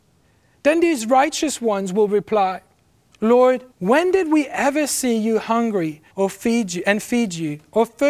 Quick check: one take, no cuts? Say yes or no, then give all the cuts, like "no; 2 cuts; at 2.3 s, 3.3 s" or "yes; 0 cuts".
no; 2 cuts; at 3.7 s, 6.1 s